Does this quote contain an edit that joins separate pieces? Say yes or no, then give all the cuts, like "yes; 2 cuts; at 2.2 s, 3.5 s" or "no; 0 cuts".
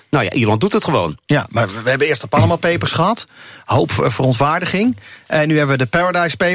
no; 0 cuts